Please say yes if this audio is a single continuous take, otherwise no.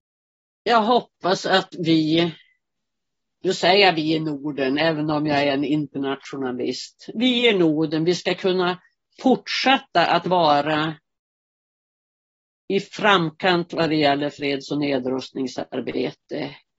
yes